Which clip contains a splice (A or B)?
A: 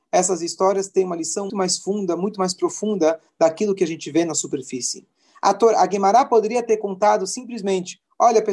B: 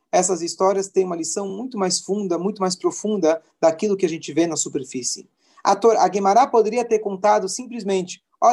A